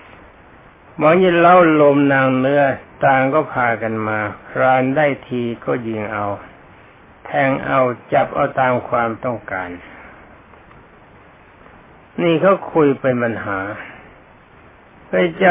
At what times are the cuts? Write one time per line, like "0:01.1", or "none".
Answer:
none